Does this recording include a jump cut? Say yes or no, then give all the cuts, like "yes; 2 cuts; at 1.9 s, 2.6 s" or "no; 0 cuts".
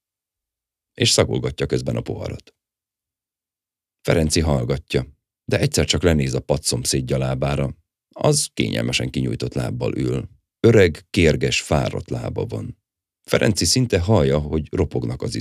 yes; 2 cuts; at 10.5 s, 13.2 s